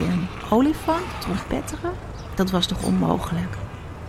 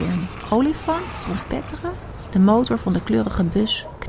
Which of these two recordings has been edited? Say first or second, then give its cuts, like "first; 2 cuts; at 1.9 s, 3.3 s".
second; 1 cut; at 2.3 s